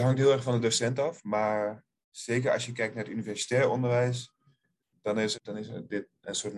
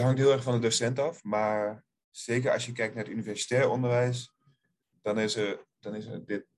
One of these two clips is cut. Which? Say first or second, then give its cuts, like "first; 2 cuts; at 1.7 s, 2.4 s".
first; 1 cut; at 5.3 s